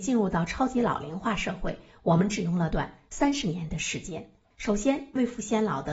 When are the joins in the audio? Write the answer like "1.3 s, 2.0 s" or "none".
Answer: 2.7 s, 4.5 s

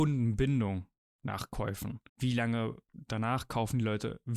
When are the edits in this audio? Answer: 2.1 s

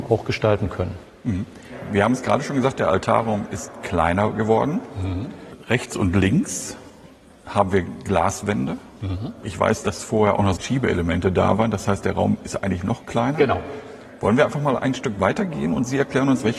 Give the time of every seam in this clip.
10.6 s

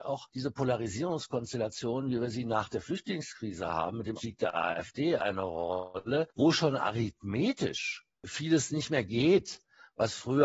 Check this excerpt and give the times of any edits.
4.2 s

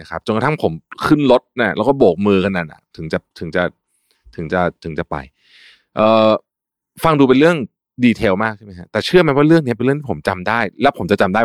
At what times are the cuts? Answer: none

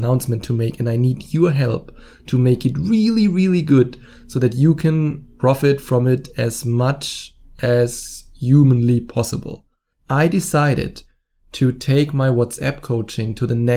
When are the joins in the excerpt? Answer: none

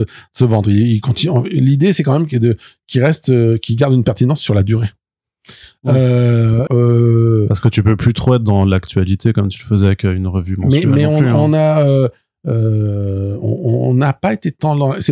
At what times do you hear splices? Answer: 6.7 s

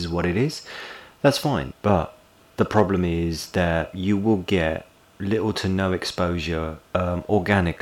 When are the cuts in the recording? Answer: 1.7 s

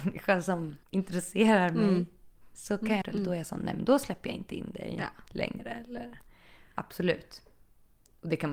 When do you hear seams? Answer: 3.0 s

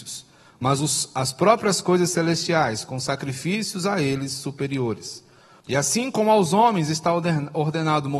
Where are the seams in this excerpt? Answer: 5.6 s

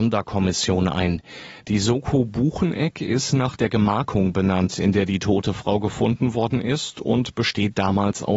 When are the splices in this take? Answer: none

